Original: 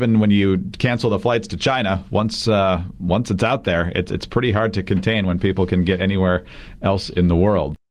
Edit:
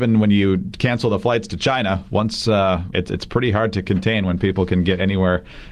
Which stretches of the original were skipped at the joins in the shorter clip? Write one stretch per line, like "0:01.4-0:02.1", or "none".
0:02.9-0:03.9